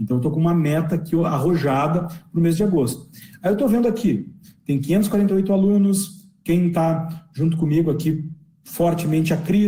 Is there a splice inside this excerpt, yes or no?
no